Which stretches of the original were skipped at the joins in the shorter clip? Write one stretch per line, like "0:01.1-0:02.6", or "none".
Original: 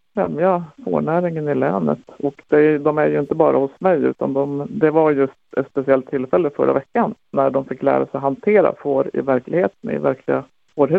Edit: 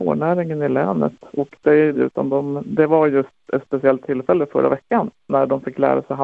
0:02.8-0:04.0